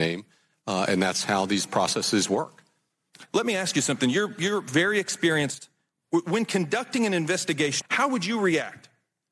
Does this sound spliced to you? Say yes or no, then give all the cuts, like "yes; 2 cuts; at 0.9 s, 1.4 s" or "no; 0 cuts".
yes; 1 cut; at 7.8 s